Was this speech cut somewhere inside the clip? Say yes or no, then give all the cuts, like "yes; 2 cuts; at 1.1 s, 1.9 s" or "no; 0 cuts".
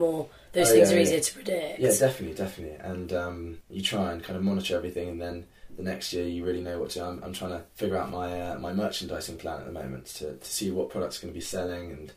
yes; 1 cut; at 7.7 s